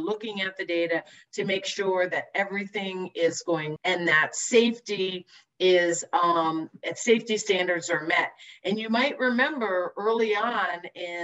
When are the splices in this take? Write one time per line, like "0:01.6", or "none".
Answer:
0:03.8